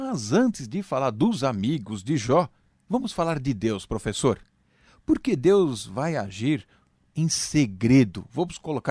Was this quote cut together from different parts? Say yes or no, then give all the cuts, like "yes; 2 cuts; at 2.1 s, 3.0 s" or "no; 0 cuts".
no; 0 cuts